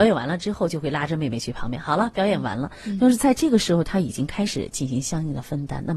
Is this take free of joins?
yes; 0 cuts

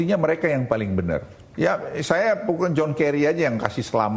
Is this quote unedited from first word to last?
yes; 0 cuts

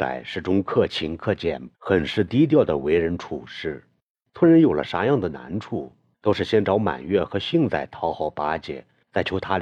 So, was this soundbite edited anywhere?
yes; 1 cut; at 1.7 s

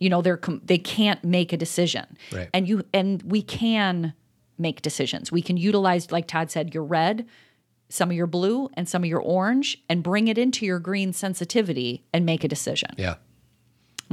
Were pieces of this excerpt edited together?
no; 0 cuts

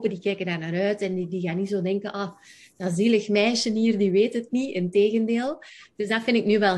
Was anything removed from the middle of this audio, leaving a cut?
no; 0 cuts

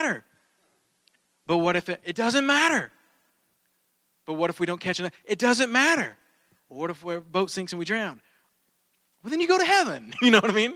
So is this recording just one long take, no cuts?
yes; 0 cuts

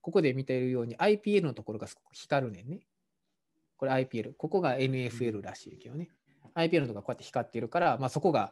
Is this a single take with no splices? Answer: yes; 0 cuts

